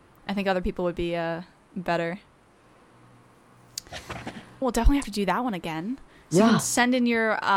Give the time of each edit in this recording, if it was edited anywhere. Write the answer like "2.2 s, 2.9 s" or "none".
4.6 s